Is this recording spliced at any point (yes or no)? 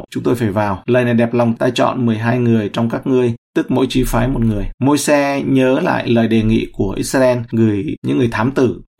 yes